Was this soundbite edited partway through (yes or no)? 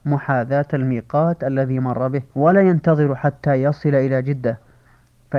yes